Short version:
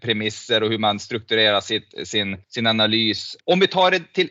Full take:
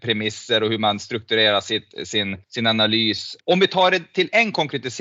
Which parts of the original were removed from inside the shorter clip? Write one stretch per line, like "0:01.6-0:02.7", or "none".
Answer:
none